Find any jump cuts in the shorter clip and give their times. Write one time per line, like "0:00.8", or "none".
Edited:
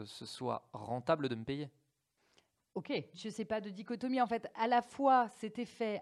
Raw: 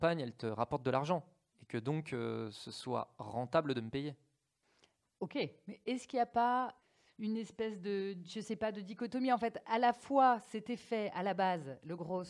0:03.1